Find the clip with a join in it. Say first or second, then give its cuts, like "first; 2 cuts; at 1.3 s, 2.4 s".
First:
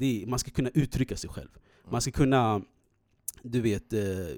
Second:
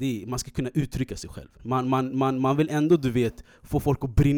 second; 1 cut; at 1.6 s